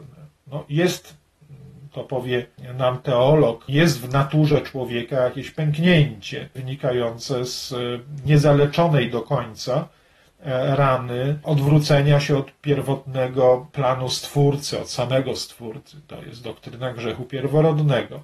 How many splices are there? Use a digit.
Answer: 0